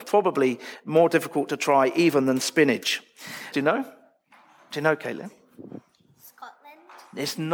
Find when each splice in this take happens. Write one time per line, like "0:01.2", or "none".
0:03.5